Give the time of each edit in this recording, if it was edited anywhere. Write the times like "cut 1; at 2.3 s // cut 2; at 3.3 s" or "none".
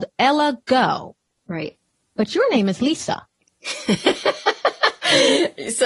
none